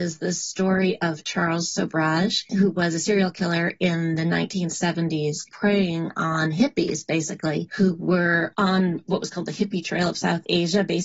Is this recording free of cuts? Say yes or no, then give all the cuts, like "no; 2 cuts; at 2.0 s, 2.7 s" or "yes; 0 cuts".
yes; 0 cuts